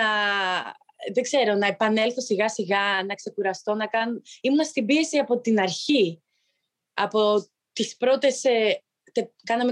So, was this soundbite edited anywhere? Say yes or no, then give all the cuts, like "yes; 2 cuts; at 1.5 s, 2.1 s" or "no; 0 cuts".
no; 0 cuts